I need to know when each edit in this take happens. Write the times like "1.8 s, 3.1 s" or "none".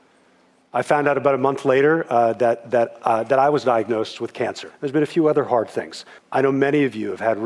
4.7 s, 6.2 s